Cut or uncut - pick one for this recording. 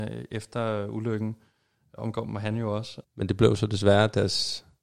cut